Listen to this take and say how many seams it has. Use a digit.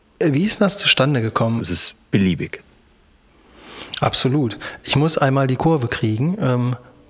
1